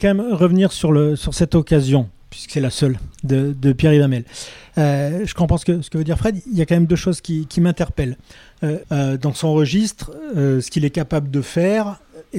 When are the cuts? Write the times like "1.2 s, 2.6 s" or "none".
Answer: 8.8 s